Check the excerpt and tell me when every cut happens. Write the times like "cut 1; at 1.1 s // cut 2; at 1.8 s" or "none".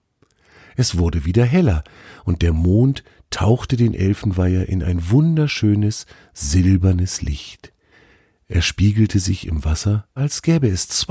cut 1; at 10.2 s